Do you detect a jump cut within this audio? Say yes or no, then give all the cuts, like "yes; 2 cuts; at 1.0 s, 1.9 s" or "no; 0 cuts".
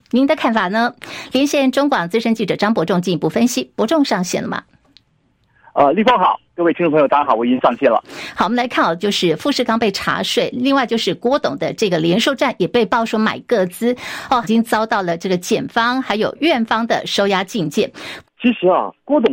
yes; 3 cuts; at 9.0 s, 14.4 s, 18.2 s